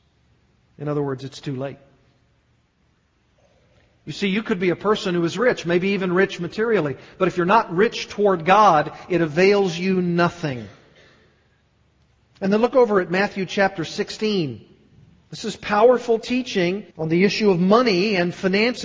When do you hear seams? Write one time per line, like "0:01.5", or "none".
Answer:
0:15.3
0:16.9